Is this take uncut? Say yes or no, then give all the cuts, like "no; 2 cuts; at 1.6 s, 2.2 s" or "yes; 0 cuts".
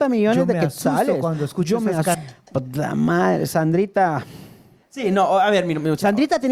no; 1 cut; at 2.1 s